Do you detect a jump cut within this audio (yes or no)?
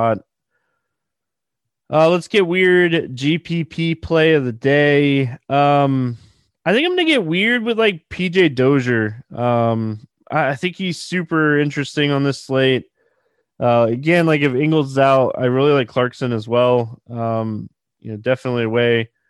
no